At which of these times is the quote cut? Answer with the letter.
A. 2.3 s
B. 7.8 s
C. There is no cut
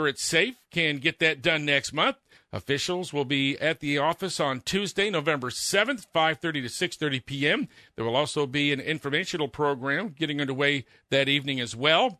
A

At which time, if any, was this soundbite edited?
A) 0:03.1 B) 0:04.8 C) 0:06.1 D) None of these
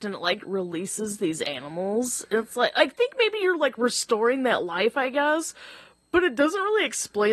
D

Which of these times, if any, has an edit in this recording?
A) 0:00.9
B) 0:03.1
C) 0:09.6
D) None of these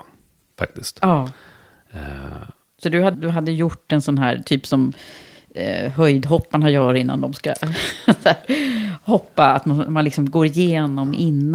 B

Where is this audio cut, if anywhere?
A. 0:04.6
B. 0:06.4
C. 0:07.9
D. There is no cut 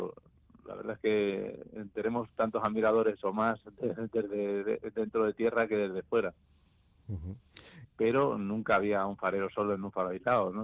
C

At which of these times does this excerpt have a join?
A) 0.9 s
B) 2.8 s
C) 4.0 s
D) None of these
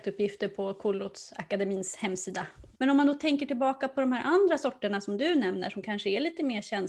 B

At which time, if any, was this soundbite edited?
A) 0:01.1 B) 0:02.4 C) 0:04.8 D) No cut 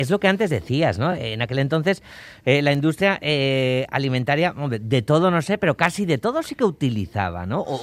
D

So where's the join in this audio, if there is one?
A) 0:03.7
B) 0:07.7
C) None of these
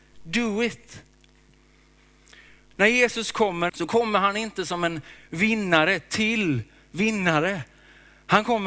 A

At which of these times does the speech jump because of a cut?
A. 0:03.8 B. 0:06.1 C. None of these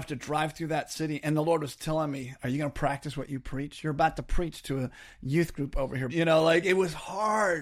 B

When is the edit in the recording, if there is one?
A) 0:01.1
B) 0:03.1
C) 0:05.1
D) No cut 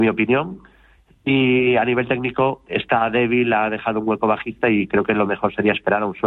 D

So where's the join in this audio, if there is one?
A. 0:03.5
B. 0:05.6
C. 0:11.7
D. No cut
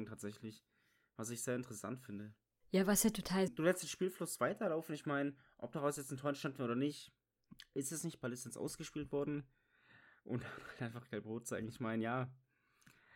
A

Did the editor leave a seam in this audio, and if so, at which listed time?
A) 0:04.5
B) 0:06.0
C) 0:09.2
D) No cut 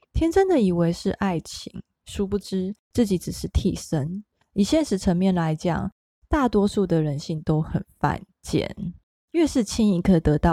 D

